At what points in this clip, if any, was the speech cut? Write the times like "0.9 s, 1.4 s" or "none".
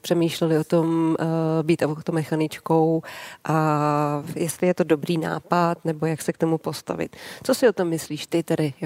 none